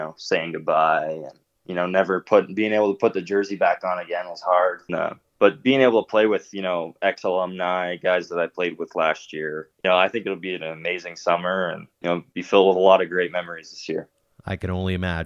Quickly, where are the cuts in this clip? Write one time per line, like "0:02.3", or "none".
0:04.9
0:09.7
0:11.9